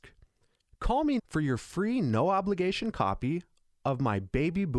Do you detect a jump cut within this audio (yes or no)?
yes